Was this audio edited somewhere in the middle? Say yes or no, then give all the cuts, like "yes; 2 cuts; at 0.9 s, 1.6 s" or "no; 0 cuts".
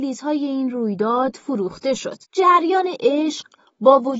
yes; 1 cut; at 2.2 s